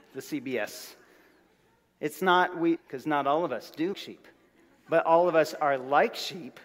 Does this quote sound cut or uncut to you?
cut